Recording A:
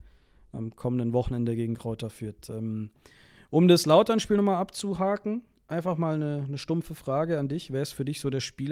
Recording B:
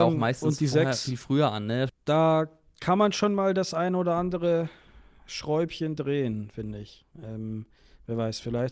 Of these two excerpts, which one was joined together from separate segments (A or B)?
B